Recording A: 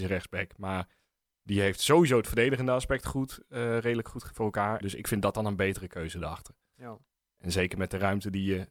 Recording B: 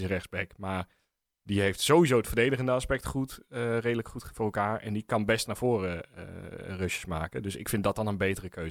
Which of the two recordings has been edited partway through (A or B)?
A